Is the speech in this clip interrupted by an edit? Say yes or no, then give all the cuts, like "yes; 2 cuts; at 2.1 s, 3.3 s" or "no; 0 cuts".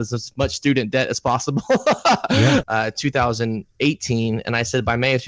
yes; 1 cut; at 2.6 s